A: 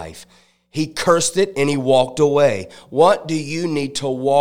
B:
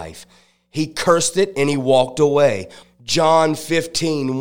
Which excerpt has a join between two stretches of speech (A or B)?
B